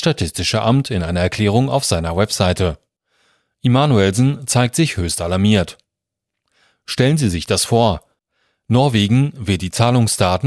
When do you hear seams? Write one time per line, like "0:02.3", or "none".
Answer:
none

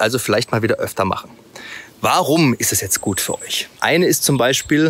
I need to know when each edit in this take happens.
0:03.8

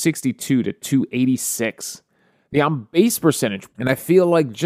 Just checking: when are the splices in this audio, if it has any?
0:03.7

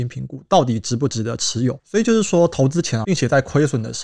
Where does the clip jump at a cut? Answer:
0:01.8
0:03.0

